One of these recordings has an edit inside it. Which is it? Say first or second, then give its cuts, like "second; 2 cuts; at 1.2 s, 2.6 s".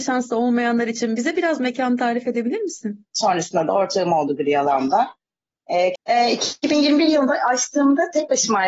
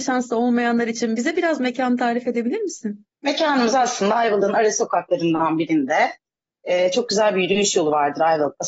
first; 2 cuts; at 3.1 s, 6.0 s